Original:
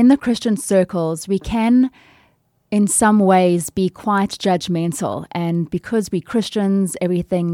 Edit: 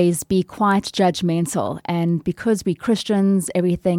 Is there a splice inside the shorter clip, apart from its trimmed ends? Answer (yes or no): no